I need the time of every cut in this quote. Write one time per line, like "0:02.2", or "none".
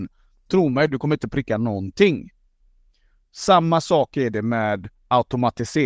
none

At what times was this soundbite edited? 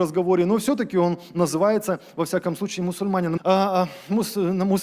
0:03.4

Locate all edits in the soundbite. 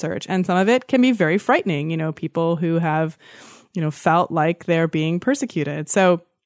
none

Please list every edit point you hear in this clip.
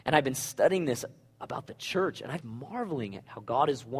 0:02.4

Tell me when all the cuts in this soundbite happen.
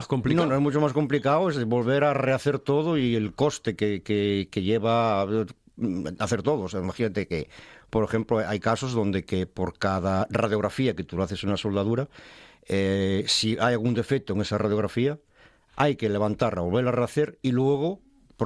none

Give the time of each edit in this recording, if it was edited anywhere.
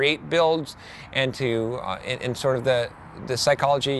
none

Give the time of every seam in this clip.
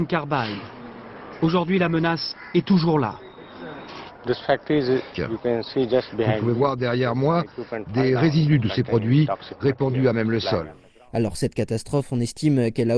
0:05.1

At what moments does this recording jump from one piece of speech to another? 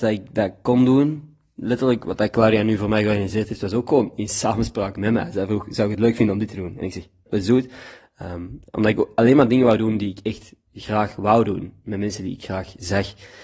0:07.3

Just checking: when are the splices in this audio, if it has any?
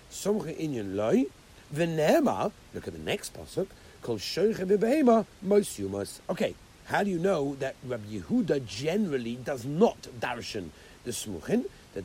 0:01.7
0:06.2

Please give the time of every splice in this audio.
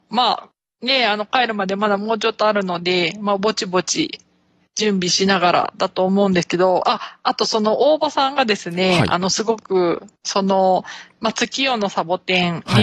0:10.2

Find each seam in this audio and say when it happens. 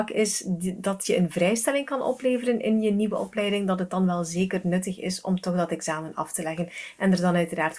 none

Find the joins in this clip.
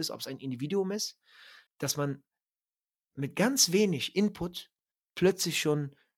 0:01.7

